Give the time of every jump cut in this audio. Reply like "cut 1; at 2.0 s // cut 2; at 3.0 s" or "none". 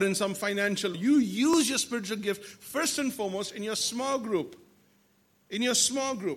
cut 1; at 0.9 s